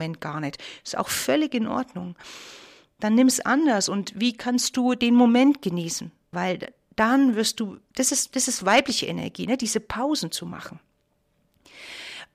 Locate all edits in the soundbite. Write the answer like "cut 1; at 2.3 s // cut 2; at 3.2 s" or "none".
cut 1; at 6.3 s